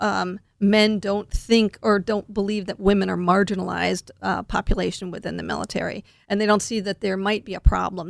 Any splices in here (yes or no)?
no